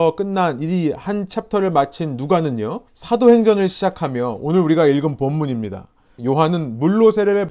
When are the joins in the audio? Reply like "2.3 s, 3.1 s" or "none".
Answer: 2.9 s, 6.2 s

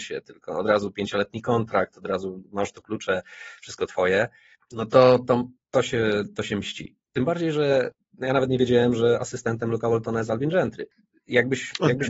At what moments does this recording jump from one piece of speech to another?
5.6 s, 7.1 s

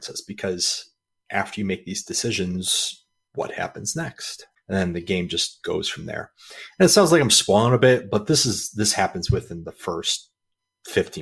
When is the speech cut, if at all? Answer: 4.6 s

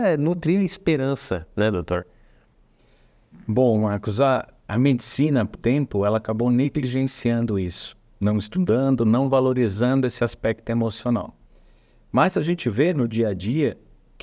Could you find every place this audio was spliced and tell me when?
5.5 s

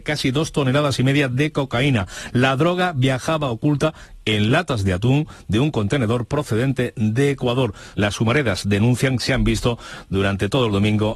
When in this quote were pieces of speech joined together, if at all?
7.9 s

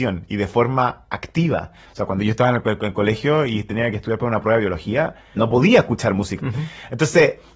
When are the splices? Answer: 1.8 s, 5.4 s, 6.4 s

